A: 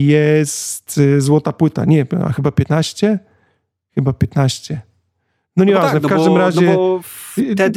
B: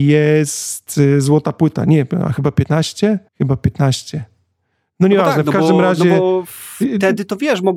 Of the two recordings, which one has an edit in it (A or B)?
B